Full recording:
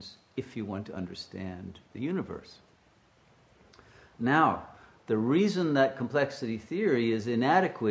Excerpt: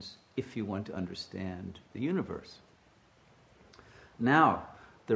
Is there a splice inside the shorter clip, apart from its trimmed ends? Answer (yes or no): no